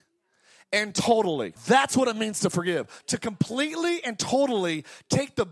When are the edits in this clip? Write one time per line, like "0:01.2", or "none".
0:01.6